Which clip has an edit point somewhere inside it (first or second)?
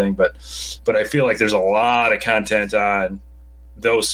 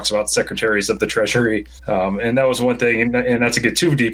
second